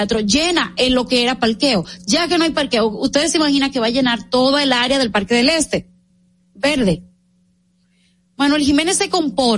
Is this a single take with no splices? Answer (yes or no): yes